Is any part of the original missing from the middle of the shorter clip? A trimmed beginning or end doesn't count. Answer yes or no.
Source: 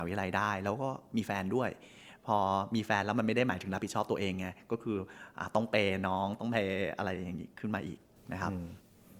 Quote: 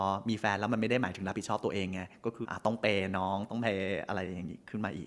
yes